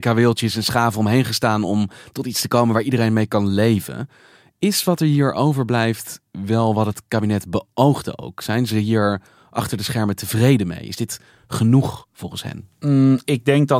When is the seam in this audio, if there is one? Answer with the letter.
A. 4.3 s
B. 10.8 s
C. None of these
C